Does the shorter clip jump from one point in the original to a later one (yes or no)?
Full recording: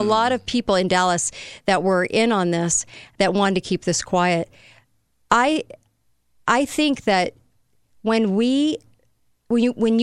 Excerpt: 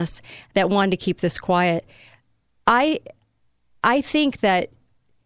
no